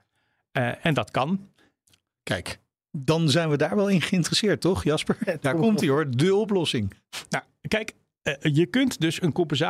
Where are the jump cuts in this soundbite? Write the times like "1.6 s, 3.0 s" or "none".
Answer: 5.4 s